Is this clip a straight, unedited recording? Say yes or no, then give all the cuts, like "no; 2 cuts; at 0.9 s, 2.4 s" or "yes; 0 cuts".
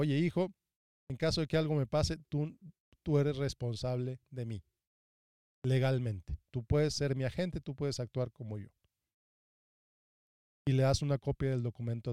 yes; 0 cuts